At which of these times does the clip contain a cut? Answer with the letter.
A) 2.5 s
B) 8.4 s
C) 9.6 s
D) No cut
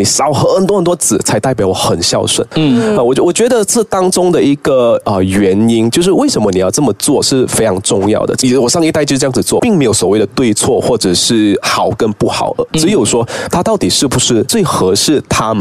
C